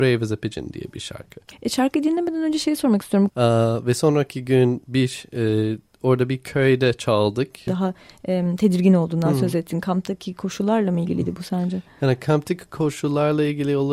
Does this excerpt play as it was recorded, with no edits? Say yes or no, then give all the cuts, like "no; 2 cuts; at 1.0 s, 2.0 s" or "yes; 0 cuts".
no; 2 cuts; at 3.3 s, 7.7 s